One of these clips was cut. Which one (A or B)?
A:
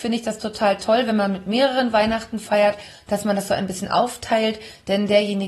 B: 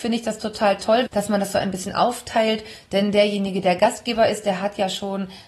B